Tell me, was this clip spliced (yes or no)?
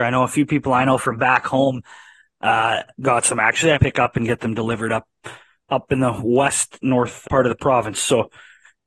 yes